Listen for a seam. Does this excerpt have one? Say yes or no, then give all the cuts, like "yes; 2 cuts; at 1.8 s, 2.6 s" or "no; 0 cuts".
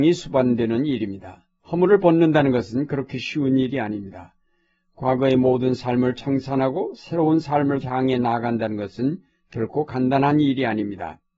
yes; 1 cut; at 1.6 s